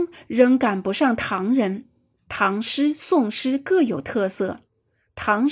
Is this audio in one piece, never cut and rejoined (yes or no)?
no